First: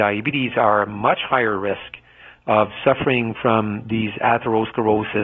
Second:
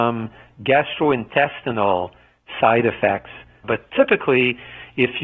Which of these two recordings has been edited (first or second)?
second